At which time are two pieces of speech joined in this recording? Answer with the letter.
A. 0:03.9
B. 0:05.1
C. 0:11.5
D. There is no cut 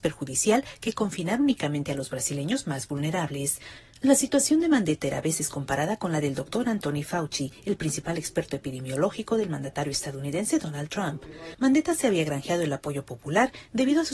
C